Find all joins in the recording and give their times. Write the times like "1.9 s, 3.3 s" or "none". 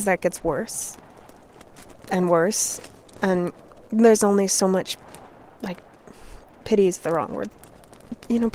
none